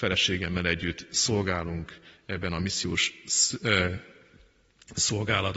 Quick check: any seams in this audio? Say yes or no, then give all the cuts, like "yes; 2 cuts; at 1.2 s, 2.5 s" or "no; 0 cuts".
no; 0 cuts